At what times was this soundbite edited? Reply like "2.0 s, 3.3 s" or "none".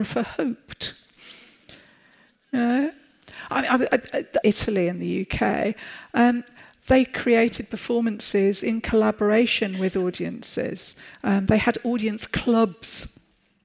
4.4 s